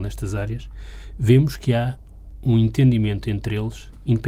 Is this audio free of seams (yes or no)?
yes